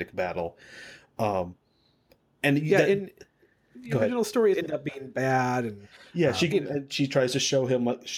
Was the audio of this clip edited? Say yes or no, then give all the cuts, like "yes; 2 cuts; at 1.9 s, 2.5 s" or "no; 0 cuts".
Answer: yes; 2 cuts; at 4.5 s, 6.5 s